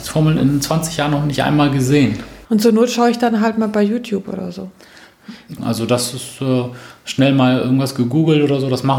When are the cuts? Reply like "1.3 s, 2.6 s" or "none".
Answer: 2.4 s, 5.6 s